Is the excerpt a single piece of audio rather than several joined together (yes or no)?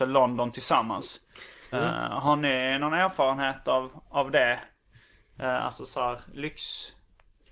no